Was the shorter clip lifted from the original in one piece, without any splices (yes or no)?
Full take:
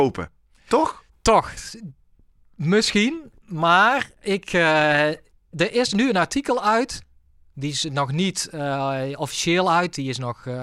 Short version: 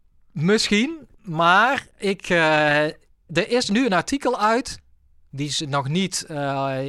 yes